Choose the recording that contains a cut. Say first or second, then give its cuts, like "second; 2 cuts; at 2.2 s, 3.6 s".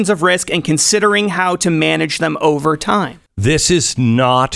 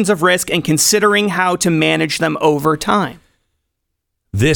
first; 1 cut; at 3.3 s